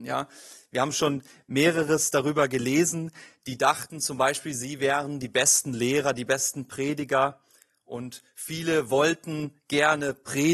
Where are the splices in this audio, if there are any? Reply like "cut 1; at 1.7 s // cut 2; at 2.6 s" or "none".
none